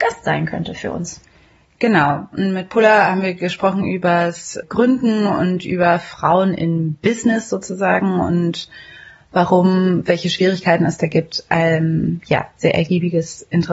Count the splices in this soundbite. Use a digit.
1